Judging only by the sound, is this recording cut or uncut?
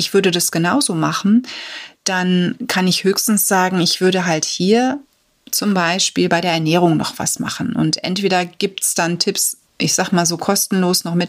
uncut